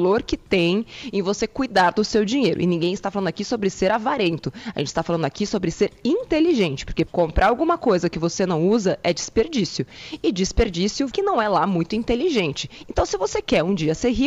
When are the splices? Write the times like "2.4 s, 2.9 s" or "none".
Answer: 7.1 s, 11.1 s, 12.8 s

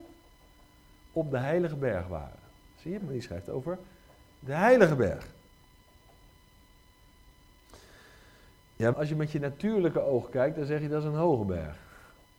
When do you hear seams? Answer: 3.0 s, 8.9 s

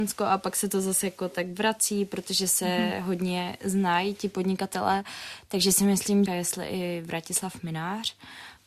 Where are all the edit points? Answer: 6.3 s

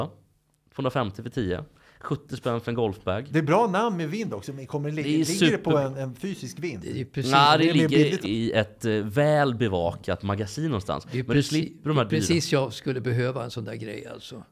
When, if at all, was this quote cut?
8.2 s

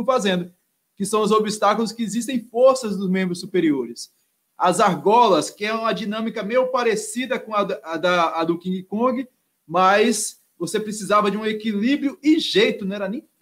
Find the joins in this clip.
4.5 s

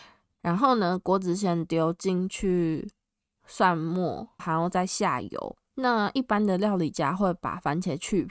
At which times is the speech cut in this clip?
4.4 s, 5.7 s

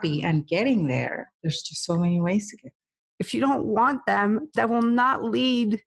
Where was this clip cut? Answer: 3.0 s, 4.6 s

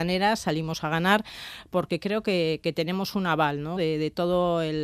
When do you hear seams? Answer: 3.8 s

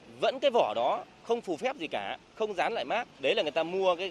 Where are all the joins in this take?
3.1 s

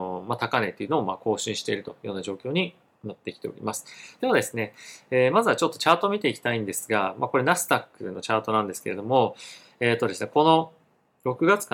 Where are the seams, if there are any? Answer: 4.2 s

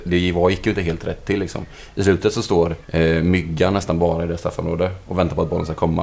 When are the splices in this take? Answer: 2.8 s

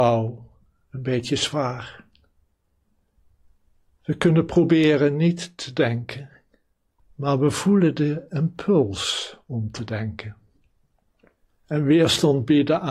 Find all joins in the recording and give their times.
none

